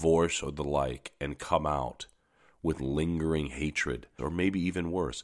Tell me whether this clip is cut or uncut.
cut